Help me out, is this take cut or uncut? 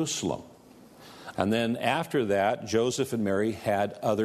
cut